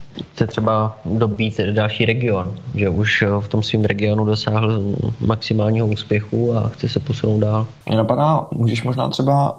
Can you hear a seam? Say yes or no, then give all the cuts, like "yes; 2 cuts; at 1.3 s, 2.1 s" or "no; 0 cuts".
yes; 1 cut; at 7.8 s